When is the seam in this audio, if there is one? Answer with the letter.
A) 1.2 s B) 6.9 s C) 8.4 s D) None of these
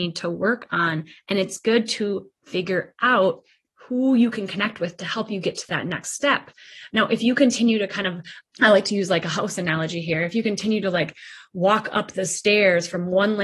C